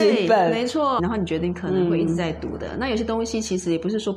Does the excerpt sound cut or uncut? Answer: cut